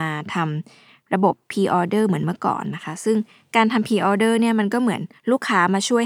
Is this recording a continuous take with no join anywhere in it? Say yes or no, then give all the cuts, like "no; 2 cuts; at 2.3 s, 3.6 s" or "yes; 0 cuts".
yes; 0 cuts